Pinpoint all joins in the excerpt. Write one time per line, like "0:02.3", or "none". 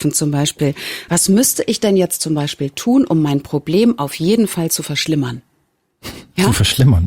none